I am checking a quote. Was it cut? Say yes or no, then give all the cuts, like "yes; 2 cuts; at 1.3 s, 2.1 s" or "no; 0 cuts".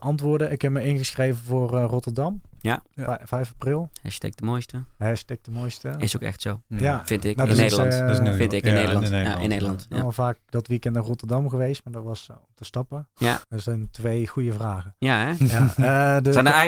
yes; 2 cuts; at 12.3 s, 13.4 s